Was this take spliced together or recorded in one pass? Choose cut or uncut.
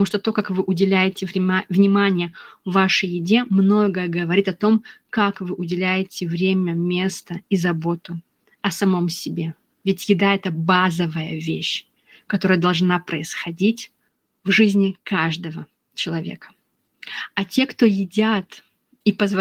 uncut